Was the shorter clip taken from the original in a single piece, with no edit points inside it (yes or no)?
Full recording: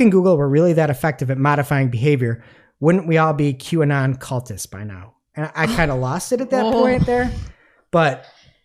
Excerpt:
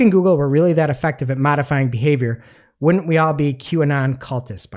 yes